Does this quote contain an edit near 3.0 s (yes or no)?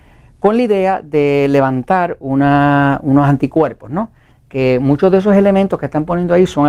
no